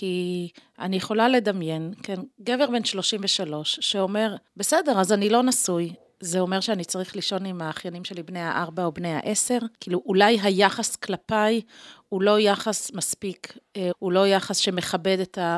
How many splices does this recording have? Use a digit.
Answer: 3